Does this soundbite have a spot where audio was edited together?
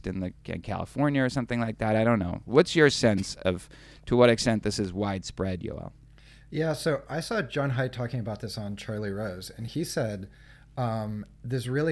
no; 0 cuts

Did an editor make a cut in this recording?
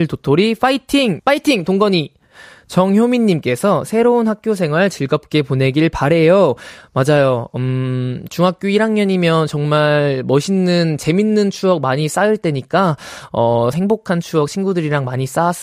yes; 2 cuts; at 1.2 s, 13.7 s

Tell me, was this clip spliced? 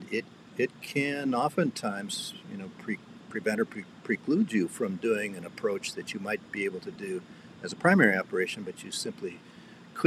no; 0 cuts

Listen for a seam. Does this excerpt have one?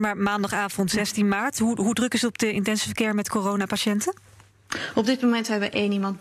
no; 0 cuts

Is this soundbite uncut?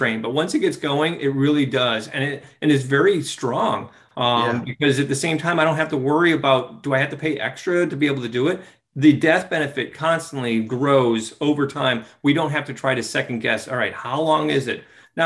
yes; 0 cuts

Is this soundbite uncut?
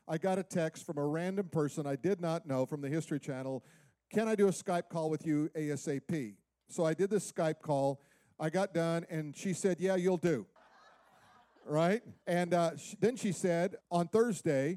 no; 3 cuts; at 10.6 s, 12.2 s, 13.8 s

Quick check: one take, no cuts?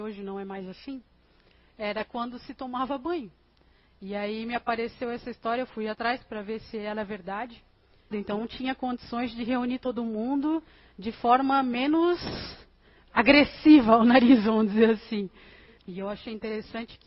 no; 3 cuts; at 3.9 s, 8.1 s, 15.8 s

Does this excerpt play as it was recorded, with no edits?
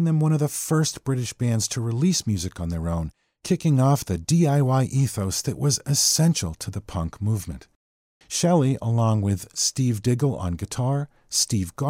no; 1 cut; at 8.2 s

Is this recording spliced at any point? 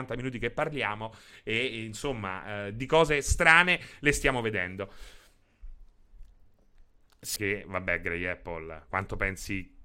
yes; 2 cuts; at 7.4 s, 8.9 s

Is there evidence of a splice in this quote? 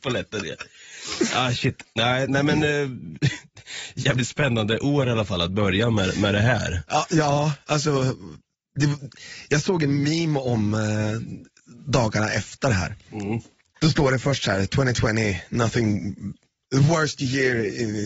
no; 0 cuts

